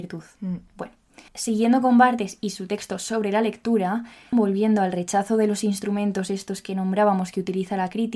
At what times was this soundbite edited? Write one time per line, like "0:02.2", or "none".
0:01.3
0:04.3